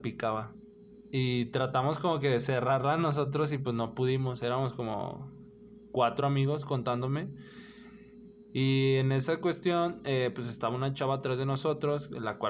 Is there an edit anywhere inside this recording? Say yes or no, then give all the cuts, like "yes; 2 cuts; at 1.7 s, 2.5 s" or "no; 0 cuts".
no; 0 cuts